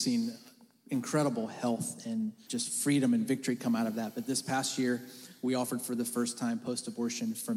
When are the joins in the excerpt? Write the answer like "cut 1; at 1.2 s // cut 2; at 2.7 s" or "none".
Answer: cut 1; at 2.5 s

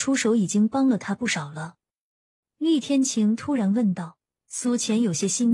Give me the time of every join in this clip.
cut 1; at 2.4 s

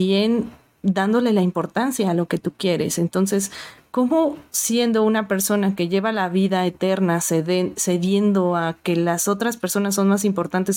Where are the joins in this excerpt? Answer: none

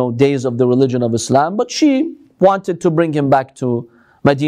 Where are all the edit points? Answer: none

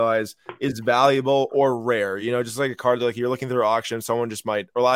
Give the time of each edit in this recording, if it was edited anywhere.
none

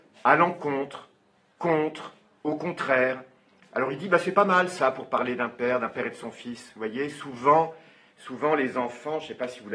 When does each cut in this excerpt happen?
none

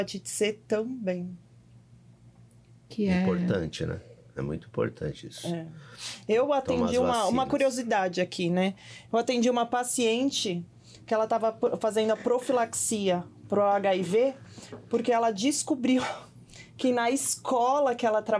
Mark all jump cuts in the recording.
none

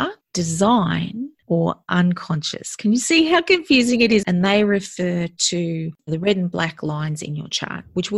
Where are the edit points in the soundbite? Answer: cut 1; at 4.2 s

